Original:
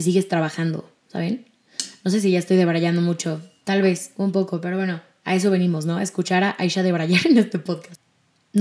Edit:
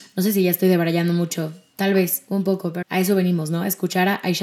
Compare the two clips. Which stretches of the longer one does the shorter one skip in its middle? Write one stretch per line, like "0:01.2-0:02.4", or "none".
0:04.7-0:05.2